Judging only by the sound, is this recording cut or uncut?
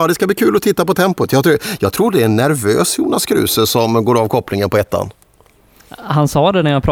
uncut